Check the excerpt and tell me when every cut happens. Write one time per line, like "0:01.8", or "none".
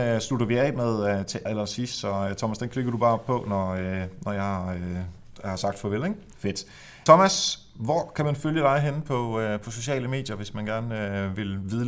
0:01.5
0:06.3